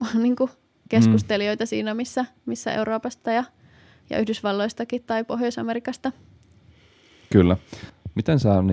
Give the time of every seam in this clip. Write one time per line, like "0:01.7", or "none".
none